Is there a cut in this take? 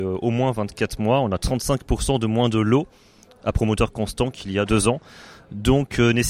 yes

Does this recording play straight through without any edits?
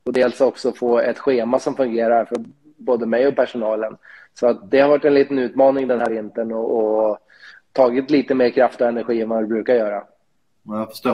yes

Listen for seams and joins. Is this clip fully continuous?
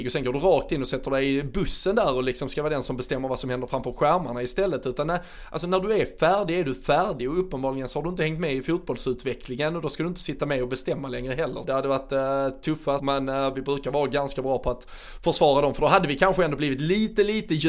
no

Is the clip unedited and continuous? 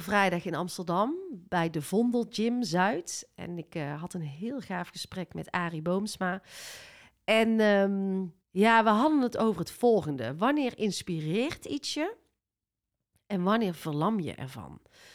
no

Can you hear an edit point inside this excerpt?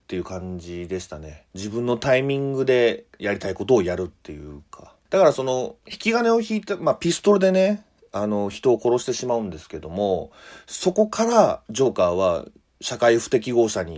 no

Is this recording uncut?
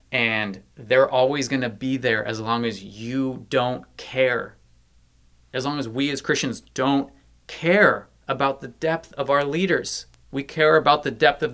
yes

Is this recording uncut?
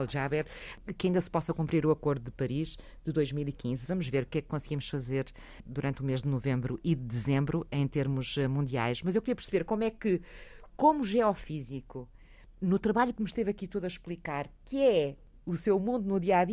yes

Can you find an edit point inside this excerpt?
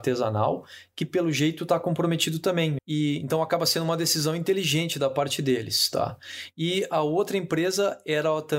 yes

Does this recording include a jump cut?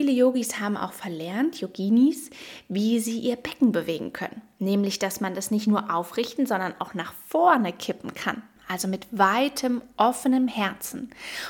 yes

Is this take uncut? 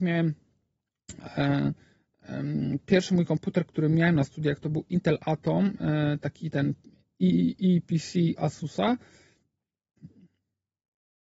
yes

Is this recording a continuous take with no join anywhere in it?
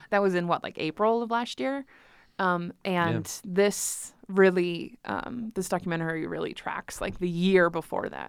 yes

